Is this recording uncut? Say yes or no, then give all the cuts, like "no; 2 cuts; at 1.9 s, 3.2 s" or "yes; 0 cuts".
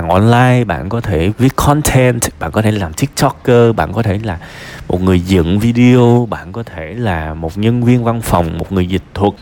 no; 1 cut; at 1.3 s